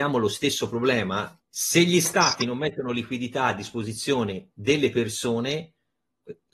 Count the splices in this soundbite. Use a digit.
1